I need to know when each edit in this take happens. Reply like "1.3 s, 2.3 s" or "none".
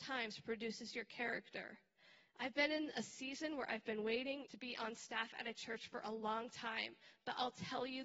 4.4 s